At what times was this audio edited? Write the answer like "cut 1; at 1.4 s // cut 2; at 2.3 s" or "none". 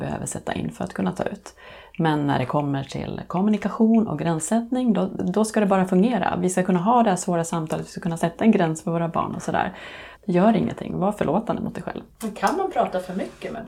cut 1; at 5.2 s // cut 2; at 10.1 s